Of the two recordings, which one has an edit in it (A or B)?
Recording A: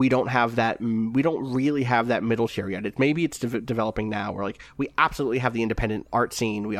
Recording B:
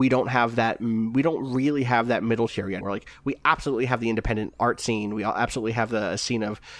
B